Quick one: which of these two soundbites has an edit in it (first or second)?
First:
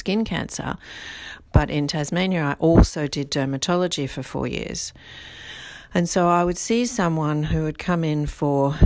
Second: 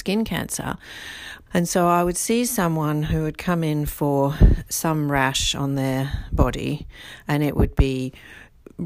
second